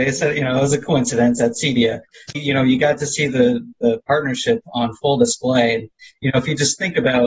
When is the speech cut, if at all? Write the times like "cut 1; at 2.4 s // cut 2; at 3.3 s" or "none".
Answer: cut 1; at 2.3 s

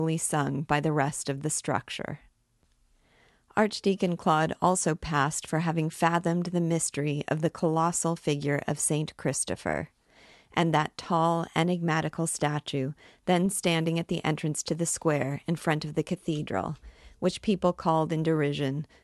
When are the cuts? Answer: none

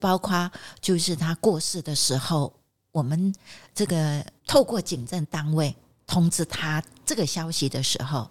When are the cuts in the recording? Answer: cut 1; at 4.4 s

